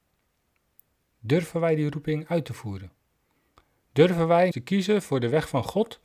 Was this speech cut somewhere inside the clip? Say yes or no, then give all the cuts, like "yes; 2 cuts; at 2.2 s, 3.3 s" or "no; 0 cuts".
yes; 1 cut; at 4.5 s